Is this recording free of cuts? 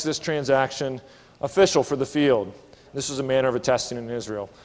no; 1 cut; at 2.9 s

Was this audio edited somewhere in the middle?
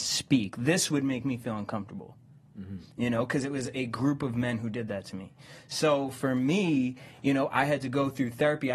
no; 0 cuts

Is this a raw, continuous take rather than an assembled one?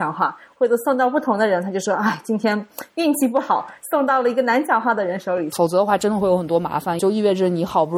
no; 2 cuts; at 5.5 s, 7.0 s

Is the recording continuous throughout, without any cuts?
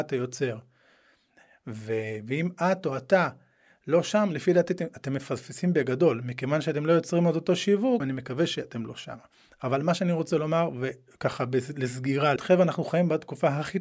no; 2 cuts; at 8.0 s, 12.4 s

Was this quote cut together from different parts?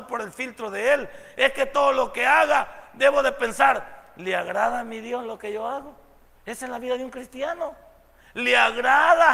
no; 0 cuts

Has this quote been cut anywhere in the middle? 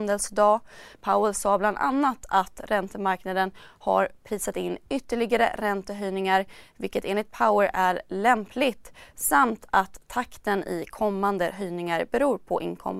yes; 1 cut; at 0.9 s

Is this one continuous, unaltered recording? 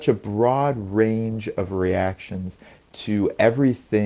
yes; 0 cuts

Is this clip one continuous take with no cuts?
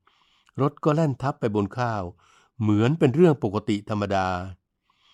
yes; 0 cuts

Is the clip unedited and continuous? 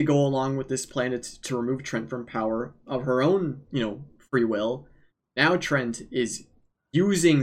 yes; 0 cuts

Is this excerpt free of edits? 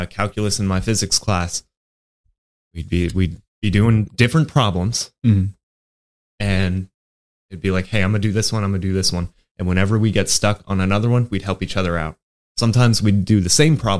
yes; 0 cuts

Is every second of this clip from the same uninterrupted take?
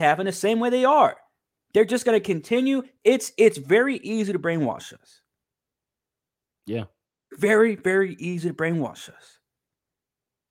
yes; 0 cuts

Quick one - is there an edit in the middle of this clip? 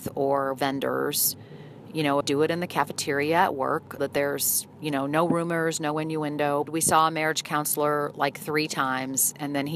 yes; 3 cuts; at 2.2 s, 4.0 s, 6.7 s

